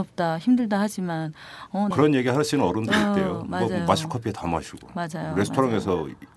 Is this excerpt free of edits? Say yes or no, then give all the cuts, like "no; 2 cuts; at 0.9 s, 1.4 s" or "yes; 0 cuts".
no; 1 cut; at 1.9 s